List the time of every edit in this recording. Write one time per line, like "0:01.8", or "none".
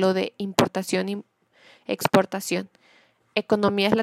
none